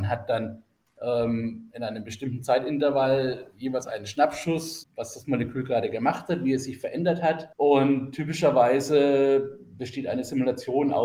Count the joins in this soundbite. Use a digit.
2